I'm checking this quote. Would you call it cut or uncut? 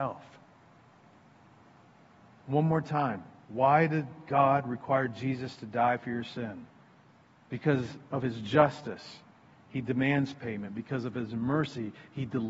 uncut